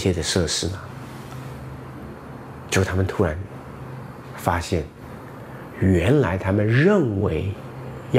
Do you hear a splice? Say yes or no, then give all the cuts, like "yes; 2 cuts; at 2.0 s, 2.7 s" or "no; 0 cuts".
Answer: no; 0 cuts